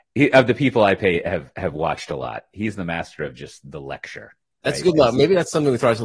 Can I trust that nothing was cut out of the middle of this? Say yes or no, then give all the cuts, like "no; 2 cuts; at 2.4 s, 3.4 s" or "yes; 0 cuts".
yes; 0 cuts